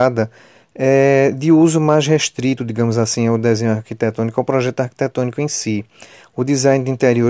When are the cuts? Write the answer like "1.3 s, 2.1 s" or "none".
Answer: none